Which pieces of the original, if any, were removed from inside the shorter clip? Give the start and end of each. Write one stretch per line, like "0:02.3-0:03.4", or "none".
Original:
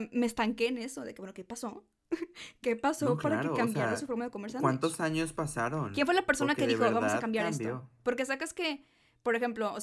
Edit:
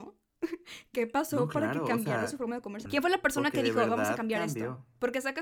0:04.5-0:05.9